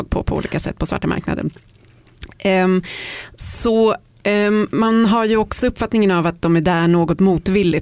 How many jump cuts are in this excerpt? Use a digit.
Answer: 0